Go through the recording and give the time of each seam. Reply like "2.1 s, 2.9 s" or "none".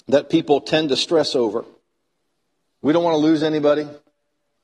2.7 s